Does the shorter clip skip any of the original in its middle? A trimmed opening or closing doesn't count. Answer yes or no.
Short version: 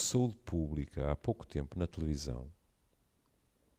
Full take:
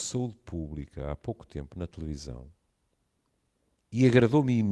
no